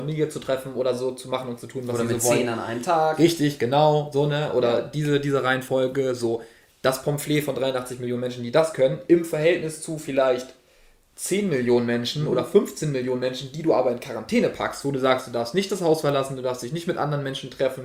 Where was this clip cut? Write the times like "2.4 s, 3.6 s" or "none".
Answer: none